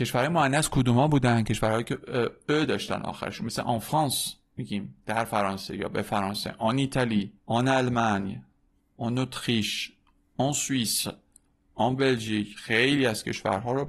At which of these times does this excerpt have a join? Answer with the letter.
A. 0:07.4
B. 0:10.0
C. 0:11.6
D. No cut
A